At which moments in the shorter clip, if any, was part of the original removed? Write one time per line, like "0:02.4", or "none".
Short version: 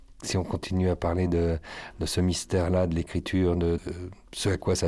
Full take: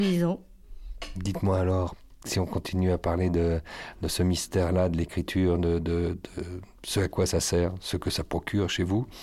0:03.8